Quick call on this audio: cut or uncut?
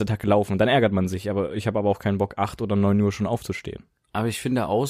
uncut